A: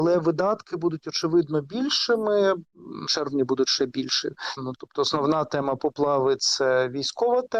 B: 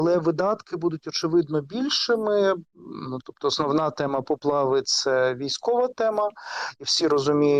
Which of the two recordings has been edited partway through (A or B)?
A